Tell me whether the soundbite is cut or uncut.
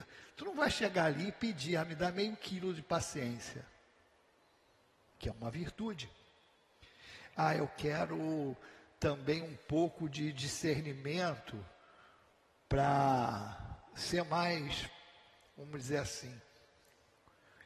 uncut